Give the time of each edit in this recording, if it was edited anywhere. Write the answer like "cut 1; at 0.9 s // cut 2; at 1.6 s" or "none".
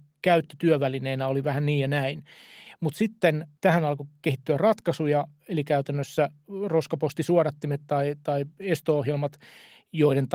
cut 1; at 3.6 s